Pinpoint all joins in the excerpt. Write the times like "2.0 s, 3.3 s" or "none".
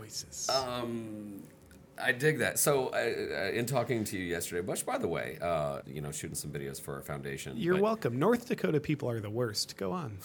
5.8 s